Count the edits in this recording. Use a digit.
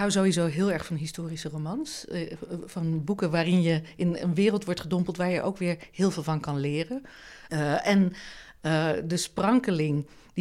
1